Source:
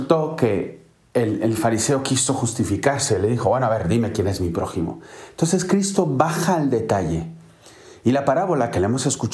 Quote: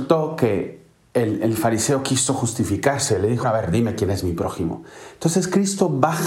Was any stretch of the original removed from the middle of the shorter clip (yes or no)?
yes